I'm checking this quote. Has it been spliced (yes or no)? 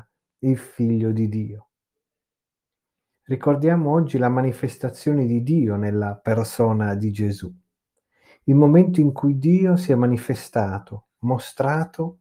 yes